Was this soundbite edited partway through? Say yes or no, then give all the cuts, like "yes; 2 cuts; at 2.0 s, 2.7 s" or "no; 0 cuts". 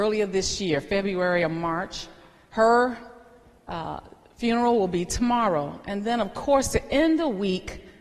no; 0 cuts